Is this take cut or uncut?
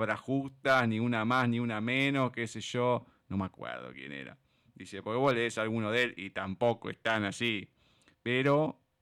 uncut